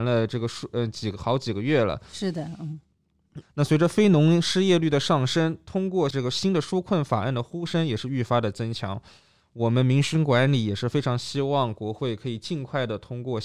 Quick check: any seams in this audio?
yes; 1 cut; at 3.4 s

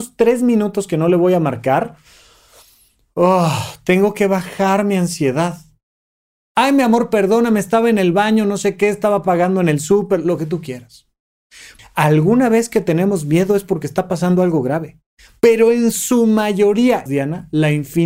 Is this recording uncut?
no; 3 cuts; at 6.4 s, 11.8 s, 17.1 s

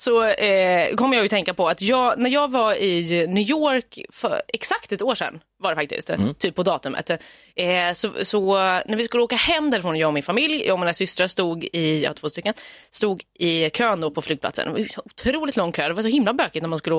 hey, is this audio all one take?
yes; 0 cuts

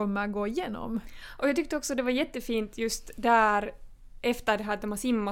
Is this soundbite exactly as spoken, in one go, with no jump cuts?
yes; 0 cuts

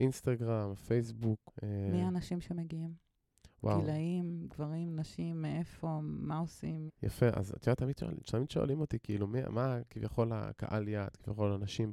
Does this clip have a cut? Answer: yes; 1 cut; at 6.9 s

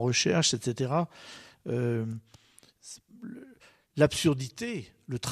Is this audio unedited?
yes; 0 cuts

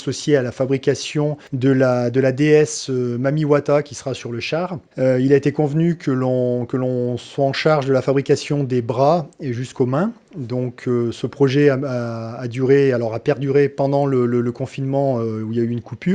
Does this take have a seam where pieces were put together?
no; 0 cuts

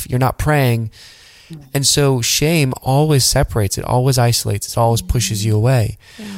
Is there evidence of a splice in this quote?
no; 0 cuts

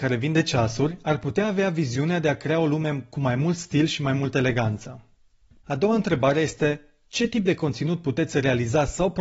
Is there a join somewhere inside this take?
no; 0 cuts

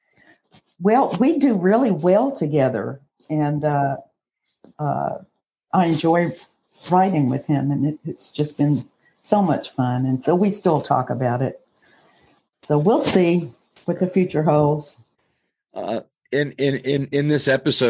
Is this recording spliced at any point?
no; 0 cuts

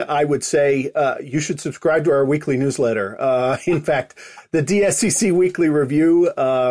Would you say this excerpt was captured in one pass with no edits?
yes; 0 cuts

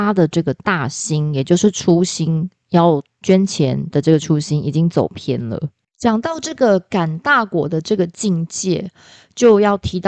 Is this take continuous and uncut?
no; 1 cut; at 5.9 s

